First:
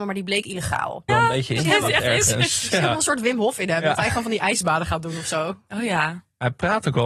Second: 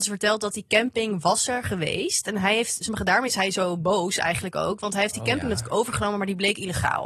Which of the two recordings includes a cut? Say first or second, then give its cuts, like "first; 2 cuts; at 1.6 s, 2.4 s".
first; 1 cut; at 1.1 s